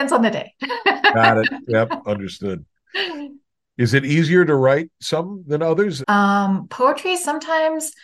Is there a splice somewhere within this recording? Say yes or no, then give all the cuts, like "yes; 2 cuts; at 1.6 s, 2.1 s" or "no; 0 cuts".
yes; 1 cut; at 6.0 s